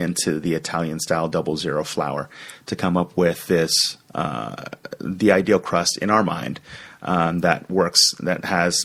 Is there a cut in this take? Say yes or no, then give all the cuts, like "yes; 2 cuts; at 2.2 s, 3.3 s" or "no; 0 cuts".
no; 0 cuts